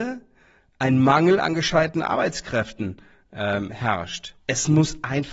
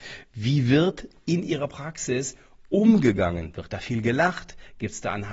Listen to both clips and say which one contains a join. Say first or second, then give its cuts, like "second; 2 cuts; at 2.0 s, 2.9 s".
first; 1 cut; at 4.4 s